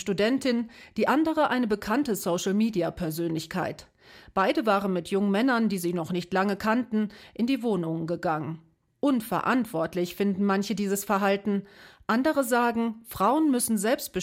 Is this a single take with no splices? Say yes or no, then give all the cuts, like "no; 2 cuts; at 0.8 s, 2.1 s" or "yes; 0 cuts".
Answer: yes; 0 cuts